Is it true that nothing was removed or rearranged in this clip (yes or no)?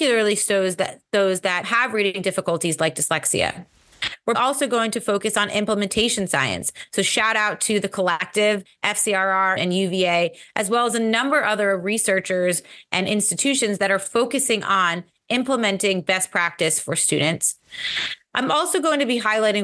no